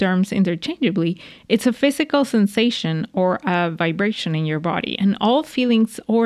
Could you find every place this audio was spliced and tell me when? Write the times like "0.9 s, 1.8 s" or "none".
none